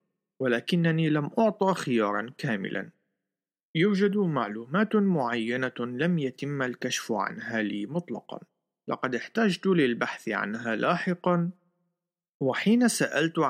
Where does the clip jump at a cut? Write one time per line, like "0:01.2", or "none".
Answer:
none